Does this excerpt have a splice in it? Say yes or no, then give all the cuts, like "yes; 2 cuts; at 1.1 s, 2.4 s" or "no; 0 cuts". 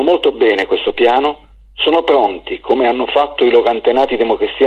no; 0 cuts